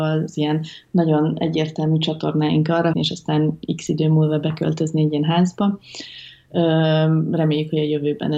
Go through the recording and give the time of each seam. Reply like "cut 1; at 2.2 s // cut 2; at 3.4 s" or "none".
cut 1; at 2.9 s

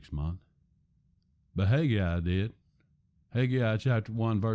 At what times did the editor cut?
cut 1; at 3.1 s

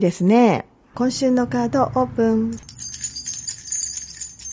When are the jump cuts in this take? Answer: cut 1; at 0.9 s

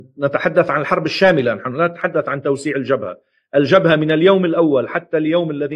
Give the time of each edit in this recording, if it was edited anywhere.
none

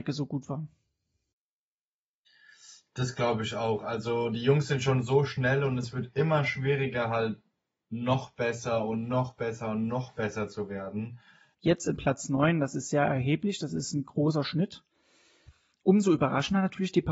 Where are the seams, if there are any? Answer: cut 1; at 11.5 s

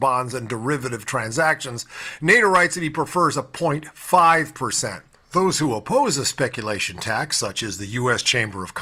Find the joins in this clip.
none

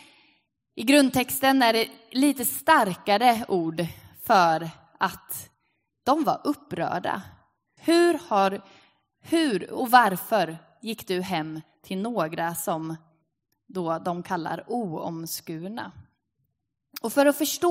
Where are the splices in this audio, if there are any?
cut 1; at 7.8 s

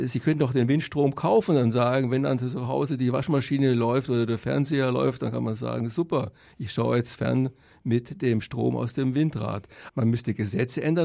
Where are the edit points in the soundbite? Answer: cut 1; at 9.9 s

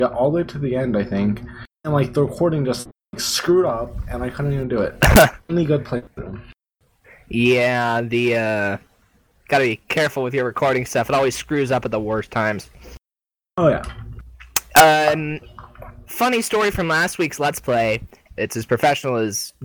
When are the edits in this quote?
cut 1; at 18.4 s

